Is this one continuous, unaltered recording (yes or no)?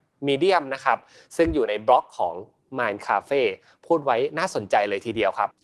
yes